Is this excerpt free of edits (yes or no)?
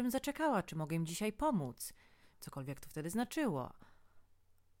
no